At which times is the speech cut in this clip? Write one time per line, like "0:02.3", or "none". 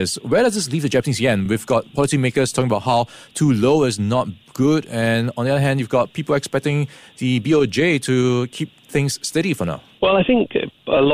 none